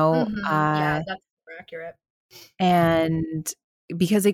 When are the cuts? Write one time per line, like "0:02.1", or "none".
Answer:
none